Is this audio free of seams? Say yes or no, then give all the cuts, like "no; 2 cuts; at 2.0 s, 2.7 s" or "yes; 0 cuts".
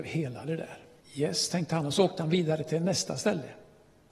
no; 1 cut; at 1.0 s